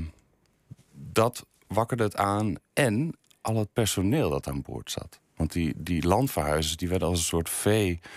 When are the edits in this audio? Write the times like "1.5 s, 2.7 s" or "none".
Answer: none